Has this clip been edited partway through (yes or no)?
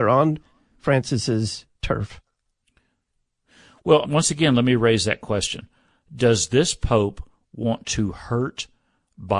yes